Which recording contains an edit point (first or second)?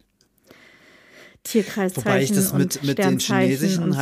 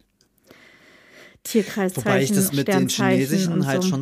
second